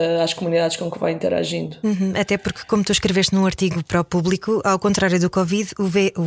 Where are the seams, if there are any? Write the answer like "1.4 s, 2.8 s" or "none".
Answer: none